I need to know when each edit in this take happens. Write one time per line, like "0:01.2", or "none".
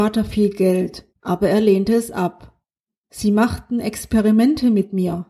0:01.1
0:03.0

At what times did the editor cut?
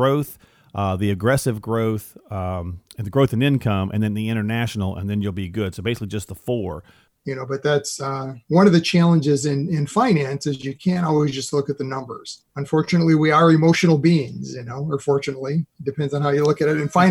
0:07.1
0:12.5

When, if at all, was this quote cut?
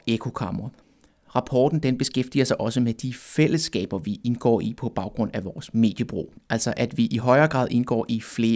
none

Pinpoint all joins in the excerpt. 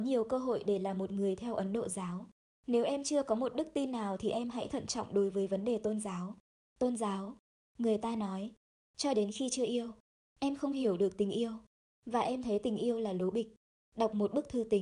0:02.6
0:08.7

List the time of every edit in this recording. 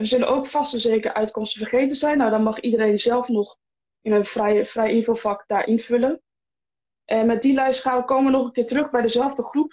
none

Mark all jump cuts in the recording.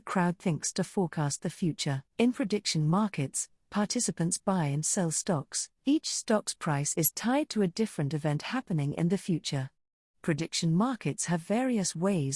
0:02.1
0:05.7
0:10.1

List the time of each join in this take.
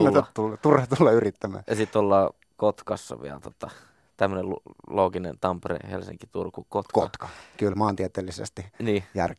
none

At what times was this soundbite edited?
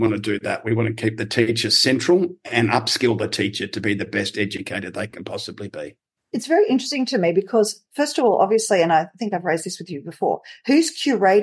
none

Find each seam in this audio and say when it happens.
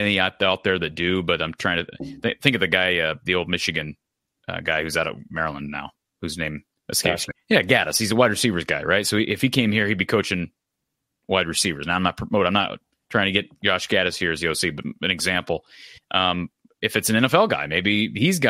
0:07.3
0:16.0

